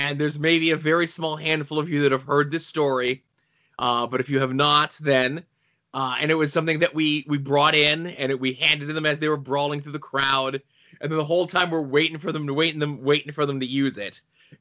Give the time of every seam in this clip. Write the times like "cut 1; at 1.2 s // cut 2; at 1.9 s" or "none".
none